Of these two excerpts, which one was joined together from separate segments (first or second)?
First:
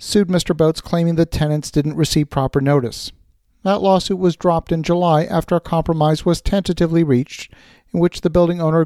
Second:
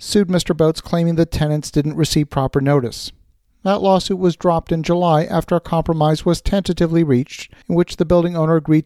second